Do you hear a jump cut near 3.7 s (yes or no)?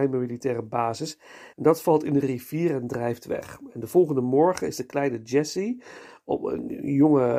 no